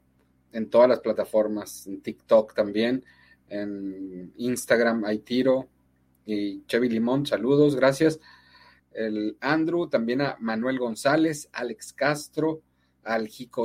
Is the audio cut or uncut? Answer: cut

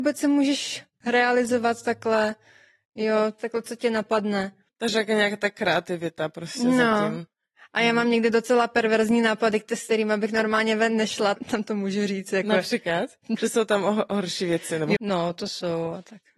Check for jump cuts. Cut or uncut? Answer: cut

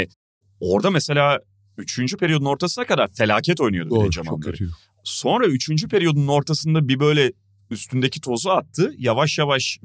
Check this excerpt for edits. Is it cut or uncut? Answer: uncut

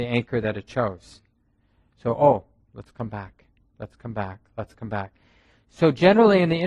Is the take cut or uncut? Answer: uncut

